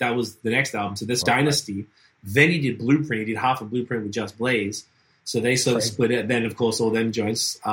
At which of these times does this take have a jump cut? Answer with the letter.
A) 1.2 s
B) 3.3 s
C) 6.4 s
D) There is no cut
A